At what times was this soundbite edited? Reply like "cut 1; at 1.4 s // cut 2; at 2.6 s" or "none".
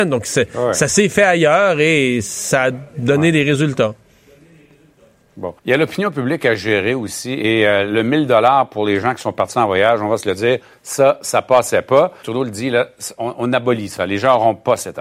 cut 1; at 5.6 s // cut 2; at 12.2 s